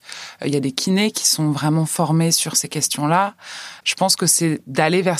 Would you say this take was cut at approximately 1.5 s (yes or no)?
no